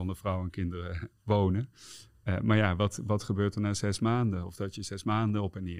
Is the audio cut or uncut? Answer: uncut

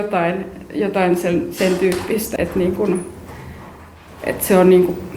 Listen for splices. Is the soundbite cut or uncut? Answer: cut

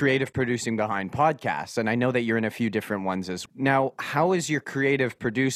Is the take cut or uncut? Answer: cut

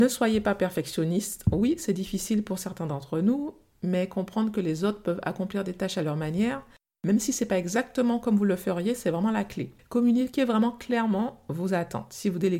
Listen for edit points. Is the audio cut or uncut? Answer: cut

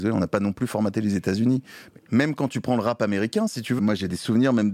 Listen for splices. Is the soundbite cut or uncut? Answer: cut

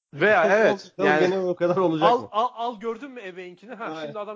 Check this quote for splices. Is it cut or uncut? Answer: uncut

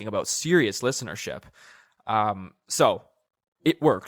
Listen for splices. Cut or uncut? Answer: uncut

